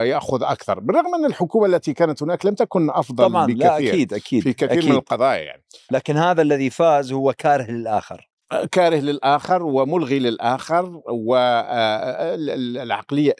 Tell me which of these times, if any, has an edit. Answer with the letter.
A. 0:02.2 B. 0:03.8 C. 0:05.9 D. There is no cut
C